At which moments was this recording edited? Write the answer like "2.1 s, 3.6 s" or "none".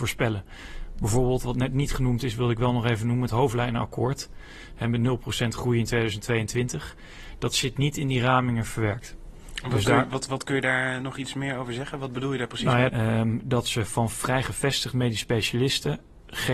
12.9 s